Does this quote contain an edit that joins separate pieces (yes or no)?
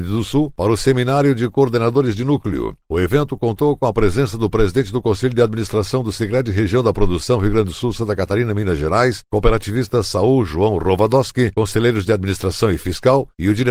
yes